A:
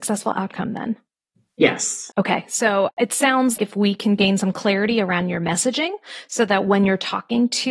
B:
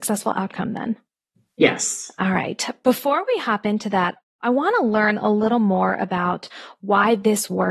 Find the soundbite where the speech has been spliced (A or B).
A